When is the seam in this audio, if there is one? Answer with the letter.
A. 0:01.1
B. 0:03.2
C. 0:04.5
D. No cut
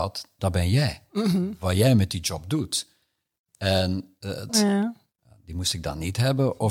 C